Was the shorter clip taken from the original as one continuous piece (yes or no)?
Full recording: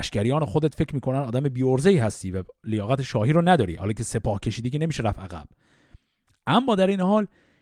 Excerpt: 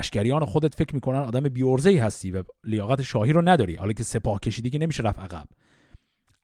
yes